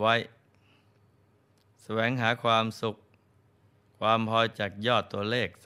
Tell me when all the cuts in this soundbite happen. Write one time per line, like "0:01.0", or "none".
0:04.5

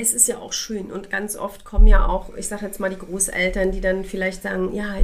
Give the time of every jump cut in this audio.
none

